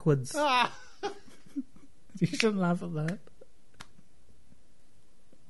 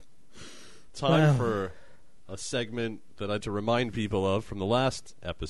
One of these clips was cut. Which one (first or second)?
second